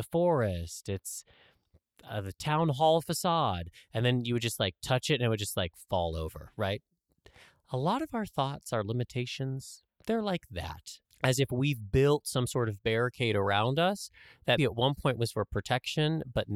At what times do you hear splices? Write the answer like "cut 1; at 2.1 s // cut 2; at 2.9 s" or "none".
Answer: cut 1; at 11.0 s // cut 2; at 14.6 s